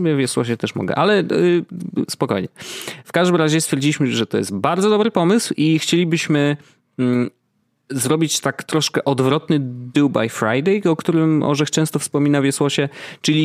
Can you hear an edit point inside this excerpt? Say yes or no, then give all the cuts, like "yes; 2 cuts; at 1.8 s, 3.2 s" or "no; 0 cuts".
no; 0 cuts